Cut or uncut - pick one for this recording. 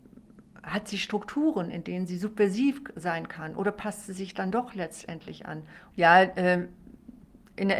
cut